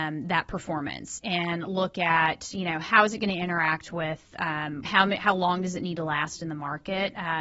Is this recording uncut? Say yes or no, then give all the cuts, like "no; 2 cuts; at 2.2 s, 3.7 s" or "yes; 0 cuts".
no; 1 cut; at 4.9 s